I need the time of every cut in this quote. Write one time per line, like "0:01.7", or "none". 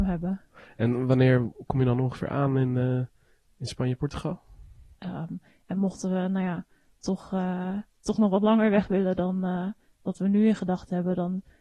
0:05.0